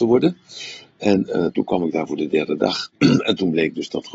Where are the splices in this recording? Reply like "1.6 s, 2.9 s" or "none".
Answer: none